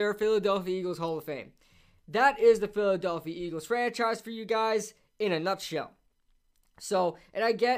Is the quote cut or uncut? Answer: uncut